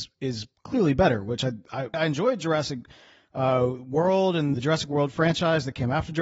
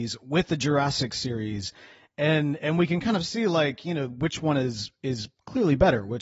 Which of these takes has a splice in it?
first; 2 cuts; at 1.9 s, 4.5 s

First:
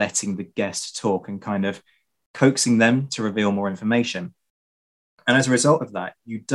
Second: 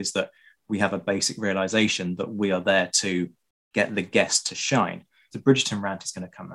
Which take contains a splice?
second; 1 cut; at 5.3 s

